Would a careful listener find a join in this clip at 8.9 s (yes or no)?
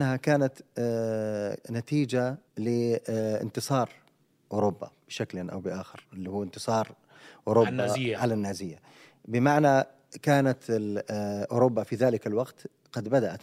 no